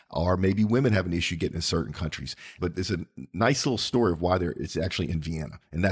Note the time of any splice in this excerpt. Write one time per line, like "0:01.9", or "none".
0:02.6